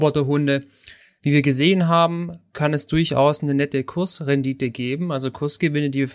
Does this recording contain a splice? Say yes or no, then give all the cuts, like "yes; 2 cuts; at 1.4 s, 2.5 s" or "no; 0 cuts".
yes; 1 cut; at 1.2 s